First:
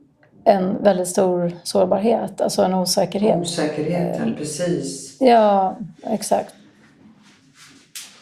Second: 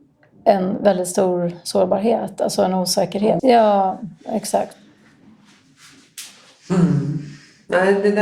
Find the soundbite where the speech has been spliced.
second; 1 cut; at 3.4 s

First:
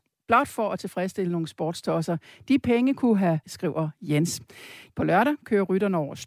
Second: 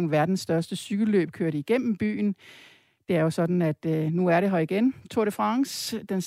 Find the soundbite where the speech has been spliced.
first; 2 cuts; at 3.4 s, 4.9 s

